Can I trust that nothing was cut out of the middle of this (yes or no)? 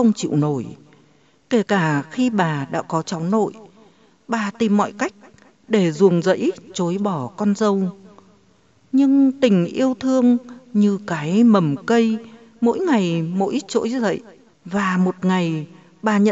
no